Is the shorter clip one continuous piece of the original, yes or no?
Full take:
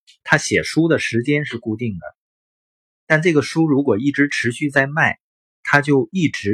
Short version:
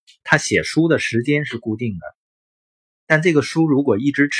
yes